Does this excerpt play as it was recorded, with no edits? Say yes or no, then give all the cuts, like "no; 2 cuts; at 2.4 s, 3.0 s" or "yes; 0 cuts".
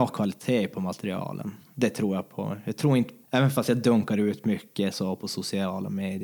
no; 1 cut; at 3.2 s